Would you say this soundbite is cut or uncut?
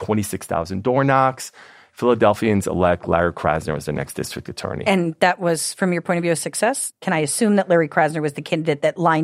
uncut